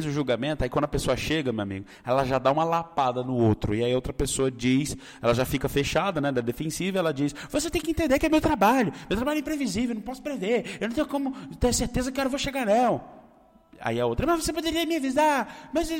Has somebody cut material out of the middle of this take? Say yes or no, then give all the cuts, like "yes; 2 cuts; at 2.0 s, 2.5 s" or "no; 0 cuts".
no; 0 cuts